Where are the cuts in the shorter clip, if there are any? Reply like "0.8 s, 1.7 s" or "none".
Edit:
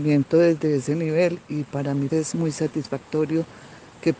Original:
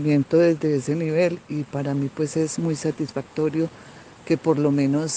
2.1 s